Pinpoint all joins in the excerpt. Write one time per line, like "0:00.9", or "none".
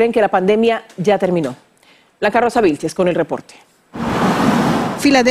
none